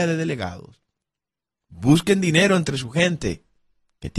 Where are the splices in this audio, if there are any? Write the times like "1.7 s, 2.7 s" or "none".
1.6 s